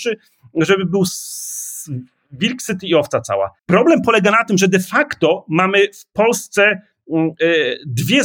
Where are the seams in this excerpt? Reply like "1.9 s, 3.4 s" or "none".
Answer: 3.6 s